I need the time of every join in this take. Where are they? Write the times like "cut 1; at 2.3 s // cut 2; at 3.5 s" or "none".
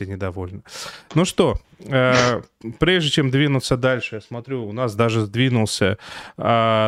none